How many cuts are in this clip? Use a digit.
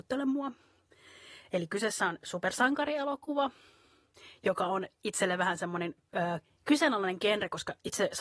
1